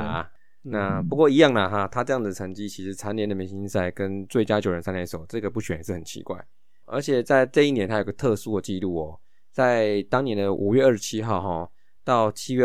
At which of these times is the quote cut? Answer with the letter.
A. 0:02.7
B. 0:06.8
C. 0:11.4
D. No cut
D